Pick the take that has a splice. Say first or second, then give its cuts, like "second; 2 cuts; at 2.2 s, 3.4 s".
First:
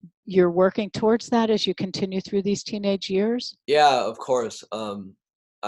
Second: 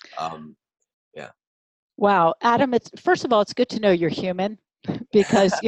first; 1 cut; at 3.6 s